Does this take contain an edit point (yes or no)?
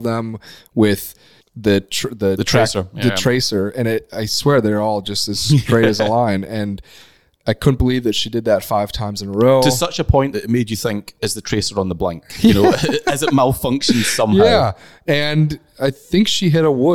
no